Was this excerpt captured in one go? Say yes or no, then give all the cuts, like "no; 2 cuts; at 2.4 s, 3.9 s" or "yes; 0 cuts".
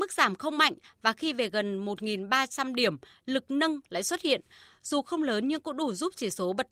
yes; 0 cuts